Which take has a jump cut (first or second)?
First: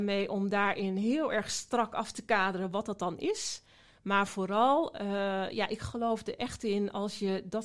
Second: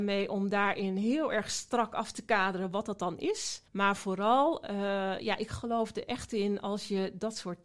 second